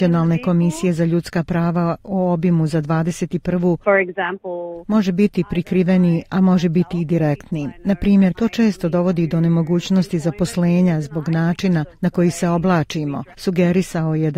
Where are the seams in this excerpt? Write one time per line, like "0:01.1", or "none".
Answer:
0:03.8
0:08.3
0:13.3